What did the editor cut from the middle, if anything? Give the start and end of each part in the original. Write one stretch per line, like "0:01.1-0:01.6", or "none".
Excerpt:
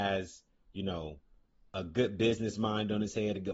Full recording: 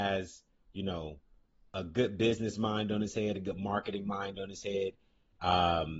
none